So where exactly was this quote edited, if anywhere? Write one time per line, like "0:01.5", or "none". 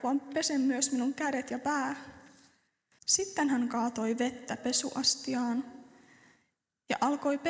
0:03.0